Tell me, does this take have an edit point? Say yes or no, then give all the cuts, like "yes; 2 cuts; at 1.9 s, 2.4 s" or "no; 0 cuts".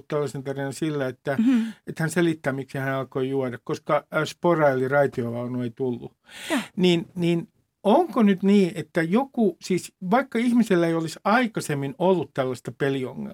no; 0 cuts